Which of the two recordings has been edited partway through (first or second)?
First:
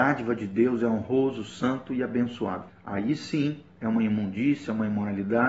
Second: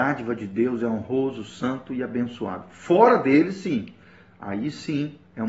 first